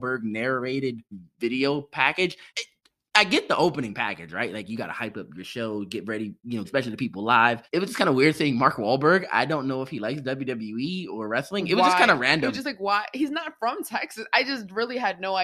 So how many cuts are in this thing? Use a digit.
1